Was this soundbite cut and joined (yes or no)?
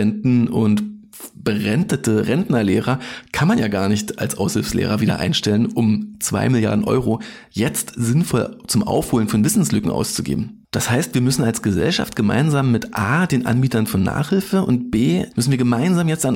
yes